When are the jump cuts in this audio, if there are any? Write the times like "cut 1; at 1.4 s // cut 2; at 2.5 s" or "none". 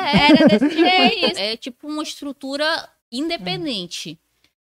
cut 1; at 1.3 s // cut 2; at 3.0 s